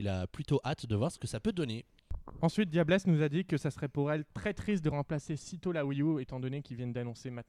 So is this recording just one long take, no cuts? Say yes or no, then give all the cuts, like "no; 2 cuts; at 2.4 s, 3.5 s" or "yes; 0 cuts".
yes; 0 cuts